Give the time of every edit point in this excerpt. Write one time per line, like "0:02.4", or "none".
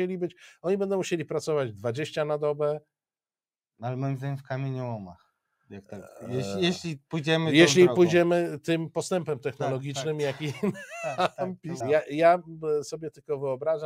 0:11.8